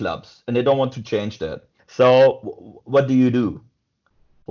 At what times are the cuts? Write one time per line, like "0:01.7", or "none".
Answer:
0:01.8